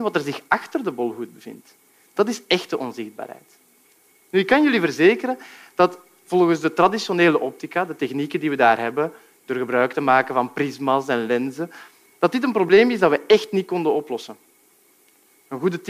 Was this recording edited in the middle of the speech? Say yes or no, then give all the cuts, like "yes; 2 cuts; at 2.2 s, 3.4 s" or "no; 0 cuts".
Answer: no; 0 cuts